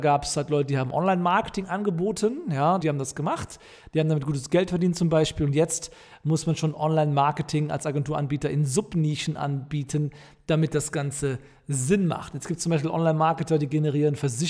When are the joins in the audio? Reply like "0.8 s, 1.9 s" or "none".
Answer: 2.8 s